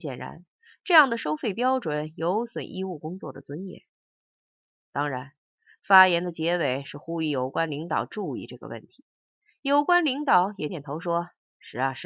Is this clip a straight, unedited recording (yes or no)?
no